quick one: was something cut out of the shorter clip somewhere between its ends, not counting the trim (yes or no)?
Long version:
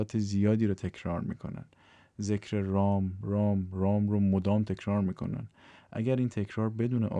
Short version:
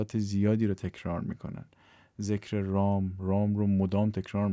yes